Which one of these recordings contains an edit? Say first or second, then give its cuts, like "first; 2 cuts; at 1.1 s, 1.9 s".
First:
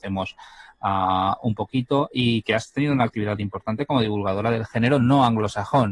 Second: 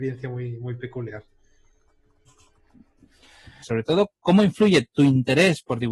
second; 1 cut; at 3.6 s